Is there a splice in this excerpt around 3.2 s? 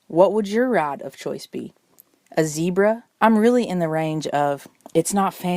yes; 1 cut; at 3.2 s

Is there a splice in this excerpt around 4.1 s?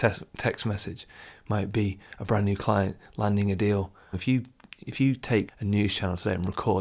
yes; 2 cuts; at 4.1 s, 5.5 s

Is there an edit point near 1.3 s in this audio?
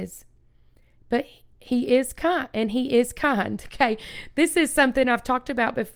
no; 0 cuts

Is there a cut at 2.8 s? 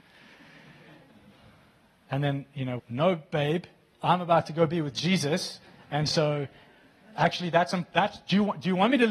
yes; 1 cut; at 2.8 s

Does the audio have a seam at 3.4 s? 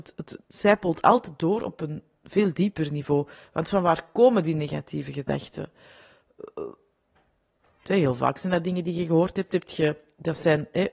no; 2 cuts; at 7.8 s, 9.5 s

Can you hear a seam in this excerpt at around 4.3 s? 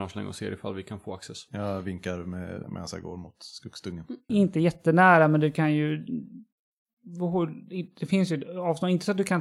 yes; 2 cuts; at 2.6 s, 4.3 s

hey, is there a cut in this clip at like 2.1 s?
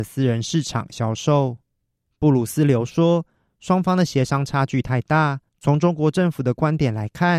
yes; 2 cuts; at 2.1 s, 5.5 s

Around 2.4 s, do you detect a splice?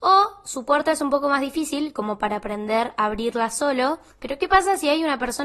no; 1 cut; at 4.1 s

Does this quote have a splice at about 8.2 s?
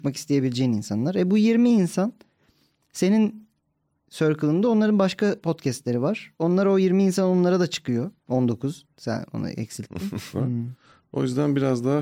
yes; 2 cuts; at 8.2 s, 10.3 s

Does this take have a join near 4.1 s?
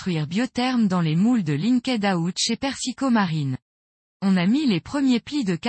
yes; 1 cut; at 4.1 s

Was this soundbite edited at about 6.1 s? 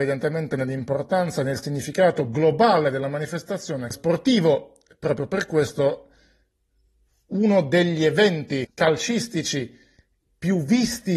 no; 2 cuts; at 3.9 s, 8.6 s

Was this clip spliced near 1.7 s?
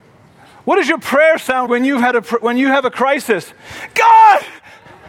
yes; 1 cut; at 1.7 s

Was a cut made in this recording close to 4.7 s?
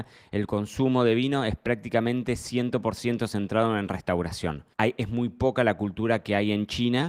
yes; 1 cut; at 4.7 s

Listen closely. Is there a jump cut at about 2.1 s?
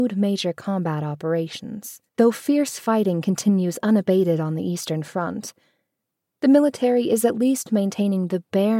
yes; 1 cut; at 2.1 s

